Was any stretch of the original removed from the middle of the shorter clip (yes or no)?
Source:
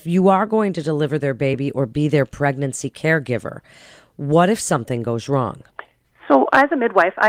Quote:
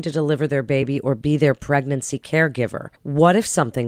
yes